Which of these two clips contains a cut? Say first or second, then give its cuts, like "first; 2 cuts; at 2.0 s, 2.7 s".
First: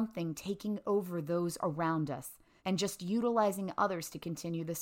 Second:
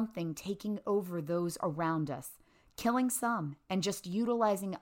first; 1 cut; at 2.6 s